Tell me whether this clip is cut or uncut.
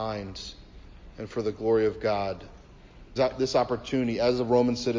cut